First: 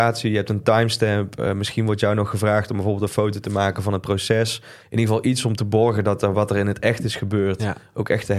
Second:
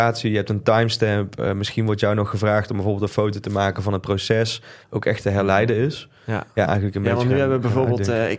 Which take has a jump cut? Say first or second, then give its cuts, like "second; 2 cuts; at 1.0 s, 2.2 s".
second; 2 cuts; at 4.8 s, 6.7 s